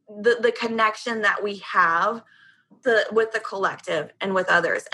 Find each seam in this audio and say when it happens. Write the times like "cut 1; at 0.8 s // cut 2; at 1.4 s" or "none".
none